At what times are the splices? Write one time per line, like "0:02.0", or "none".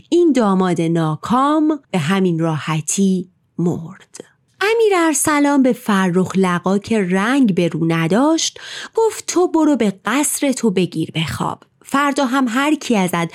0:01.8